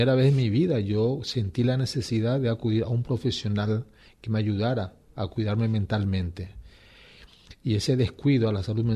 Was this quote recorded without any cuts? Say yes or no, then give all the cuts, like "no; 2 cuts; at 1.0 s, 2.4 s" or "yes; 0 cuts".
yes; 0 cuts